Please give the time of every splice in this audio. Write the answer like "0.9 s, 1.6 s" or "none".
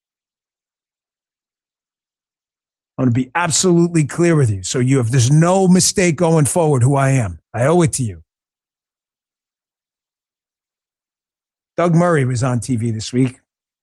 7.4 s